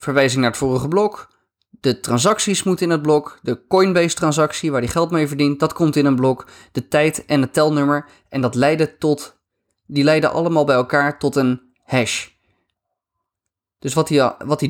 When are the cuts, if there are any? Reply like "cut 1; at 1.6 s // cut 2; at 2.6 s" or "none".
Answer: none